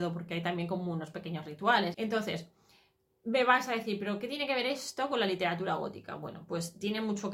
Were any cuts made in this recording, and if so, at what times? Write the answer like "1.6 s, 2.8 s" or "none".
1.9 s